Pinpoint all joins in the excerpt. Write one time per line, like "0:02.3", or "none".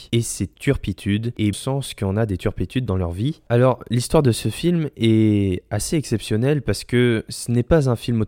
0:01.5